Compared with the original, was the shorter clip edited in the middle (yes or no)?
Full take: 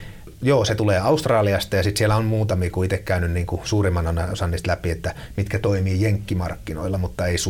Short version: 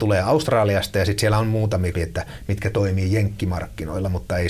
yes